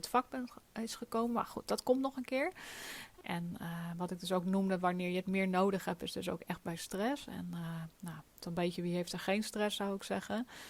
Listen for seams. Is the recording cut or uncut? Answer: cut